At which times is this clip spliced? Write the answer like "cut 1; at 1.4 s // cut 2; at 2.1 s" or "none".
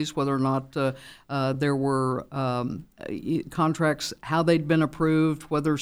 none